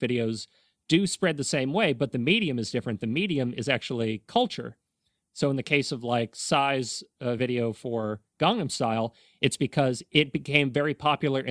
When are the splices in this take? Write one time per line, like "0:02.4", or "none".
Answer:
none